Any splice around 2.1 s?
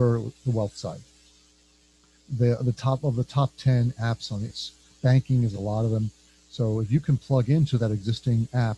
no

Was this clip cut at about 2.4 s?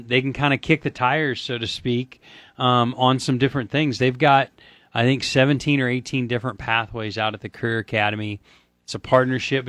no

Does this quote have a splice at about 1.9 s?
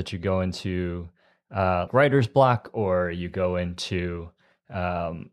yes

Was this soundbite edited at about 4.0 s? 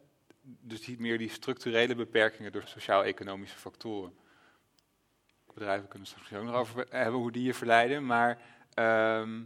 no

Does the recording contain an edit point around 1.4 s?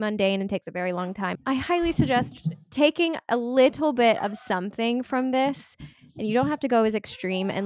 yes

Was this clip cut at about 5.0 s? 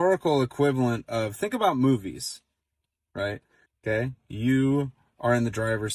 no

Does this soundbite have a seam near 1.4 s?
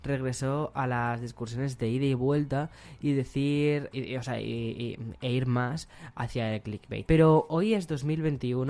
no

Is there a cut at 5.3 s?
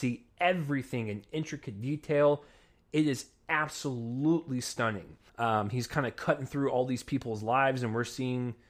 yes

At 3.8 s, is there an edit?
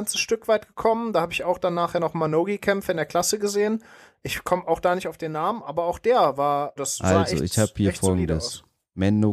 no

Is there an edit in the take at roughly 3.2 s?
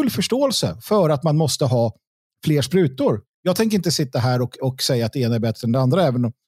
yes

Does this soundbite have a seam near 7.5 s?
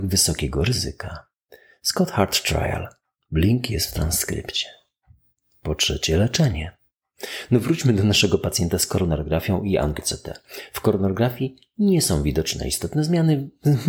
no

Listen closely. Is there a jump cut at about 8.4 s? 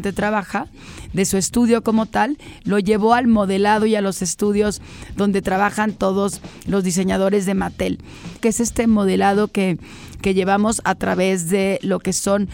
yes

